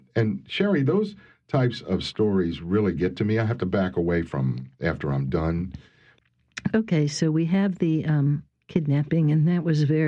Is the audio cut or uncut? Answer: uncut